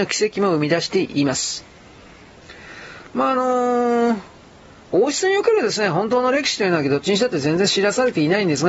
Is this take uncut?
yes; 0 cuts

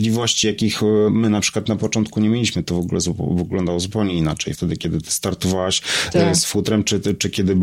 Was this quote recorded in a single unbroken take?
yes; 0 cuts

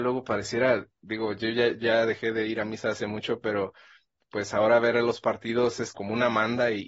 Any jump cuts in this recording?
yes; 1 cut; at 5.9 s

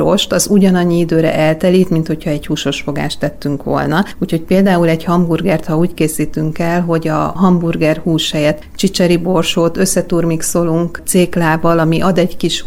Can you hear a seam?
no; 0 cuts

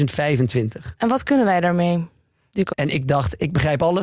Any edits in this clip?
yes; 1 cut; at 2.7 s

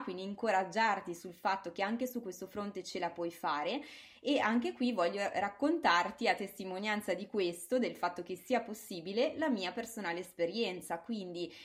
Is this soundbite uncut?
yes; 0 cuts

